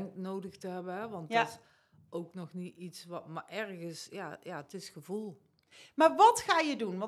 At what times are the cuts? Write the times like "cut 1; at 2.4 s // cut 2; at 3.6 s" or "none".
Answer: none